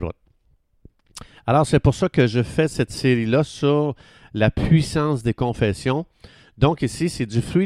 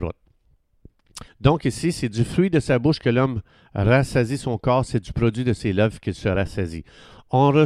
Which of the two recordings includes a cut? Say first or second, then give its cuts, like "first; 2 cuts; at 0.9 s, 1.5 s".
second; 1 cut; at 1.3 s